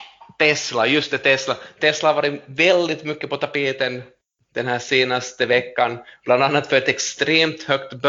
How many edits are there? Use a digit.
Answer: 0